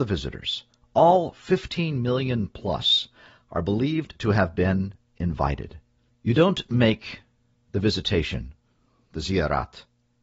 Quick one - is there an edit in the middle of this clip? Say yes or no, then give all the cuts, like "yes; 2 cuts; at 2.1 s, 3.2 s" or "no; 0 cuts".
yes; 1 cut; at 6.1 s